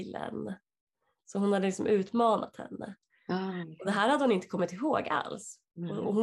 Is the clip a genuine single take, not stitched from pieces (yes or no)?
yes